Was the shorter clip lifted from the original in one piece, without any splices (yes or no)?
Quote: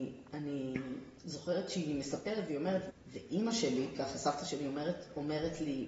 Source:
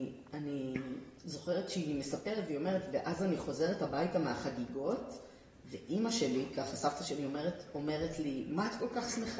no